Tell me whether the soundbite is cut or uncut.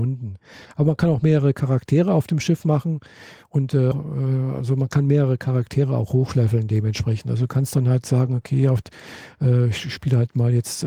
cut